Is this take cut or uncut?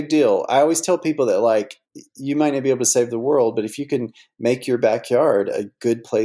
uncut